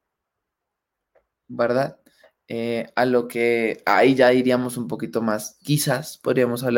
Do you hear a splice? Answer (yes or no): no